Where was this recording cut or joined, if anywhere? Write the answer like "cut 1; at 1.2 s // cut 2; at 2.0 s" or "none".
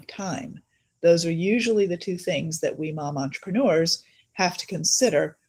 none

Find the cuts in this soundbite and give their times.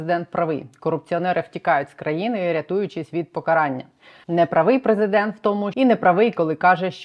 cut 1; at 4.2 s // cut 2; at 5.7 s

